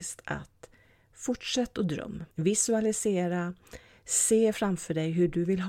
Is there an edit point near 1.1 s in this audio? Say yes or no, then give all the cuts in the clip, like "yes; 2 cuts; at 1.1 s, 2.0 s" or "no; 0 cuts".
no; 1 cut; at 2.3 s